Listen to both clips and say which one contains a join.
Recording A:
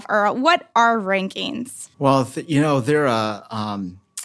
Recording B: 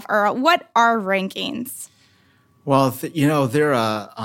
A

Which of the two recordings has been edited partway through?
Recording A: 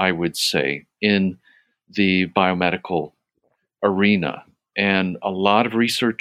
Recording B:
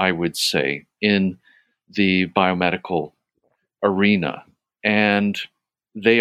B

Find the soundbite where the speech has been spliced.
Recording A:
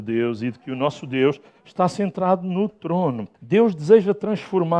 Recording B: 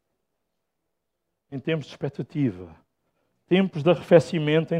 A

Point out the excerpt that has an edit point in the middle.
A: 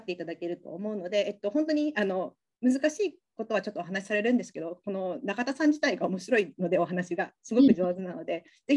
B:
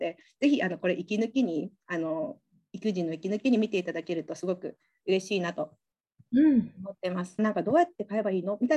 B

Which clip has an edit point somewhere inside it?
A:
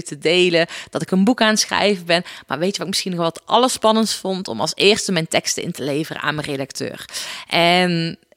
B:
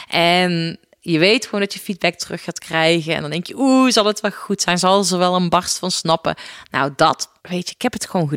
B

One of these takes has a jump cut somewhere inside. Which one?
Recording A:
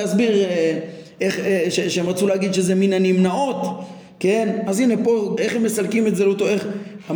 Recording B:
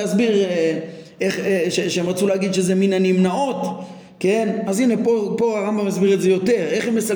A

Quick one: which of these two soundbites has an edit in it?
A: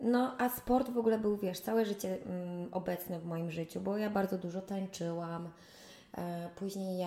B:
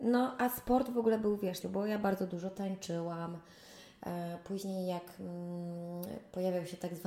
B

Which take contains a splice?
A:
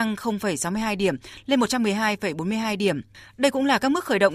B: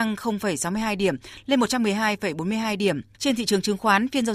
B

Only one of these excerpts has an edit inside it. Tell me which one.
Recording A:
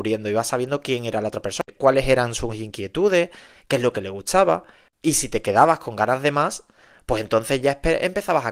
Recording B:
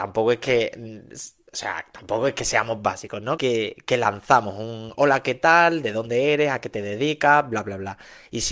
B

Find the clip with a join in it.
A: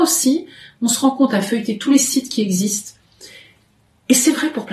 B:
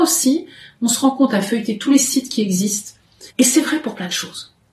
B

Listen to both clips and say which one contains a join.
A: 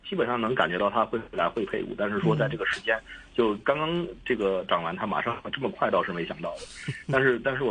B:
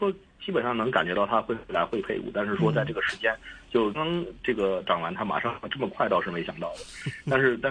B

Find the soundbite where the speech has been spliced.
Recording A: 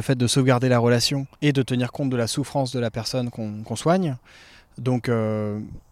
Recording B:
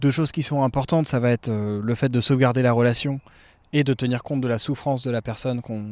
A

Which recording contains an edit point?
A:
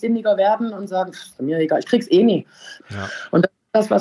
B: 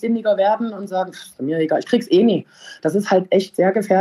A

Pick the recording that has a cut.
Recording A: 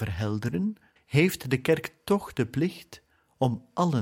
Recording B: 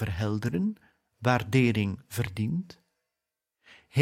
A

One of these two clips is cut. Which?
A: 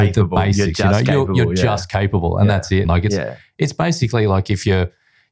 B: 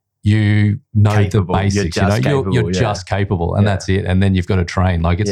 A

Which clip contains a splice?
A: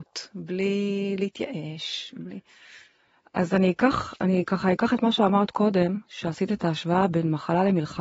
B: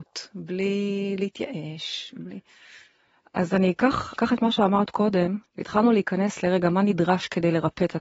B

